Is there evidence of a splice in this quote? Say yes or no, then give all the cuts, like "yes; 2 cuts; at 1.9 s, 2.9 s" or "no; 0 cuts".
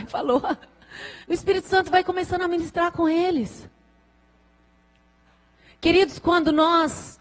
yes; 1 cut; at 1.2 s